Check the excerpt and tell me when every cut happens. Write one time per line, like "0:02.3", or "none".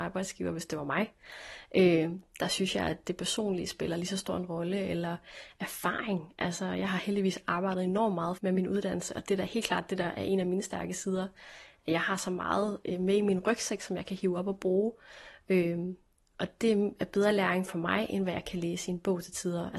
0:08.4